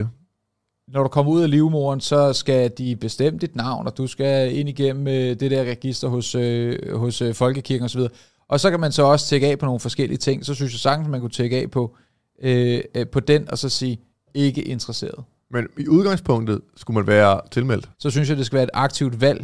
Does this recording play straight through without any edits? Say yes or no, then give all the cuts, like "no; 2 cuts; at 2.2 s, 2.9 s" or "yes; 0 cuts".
no; 1 cut; at 17.9 s